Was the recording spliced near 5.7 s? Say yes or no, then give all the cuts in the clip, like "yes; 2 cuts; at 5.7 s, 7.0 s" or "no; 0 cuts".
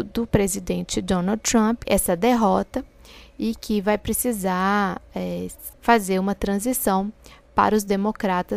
yes; 2 cuts; at 1.9 s, 5.7 s